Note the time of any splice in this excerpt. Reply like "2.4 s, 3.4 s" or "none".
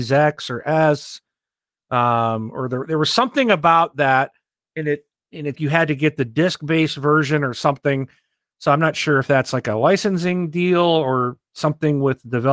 5.5 s